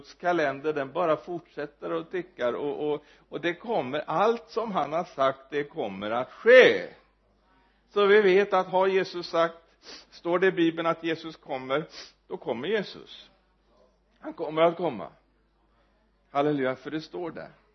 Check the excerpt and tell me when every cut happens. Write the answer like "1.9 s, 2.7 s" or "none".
none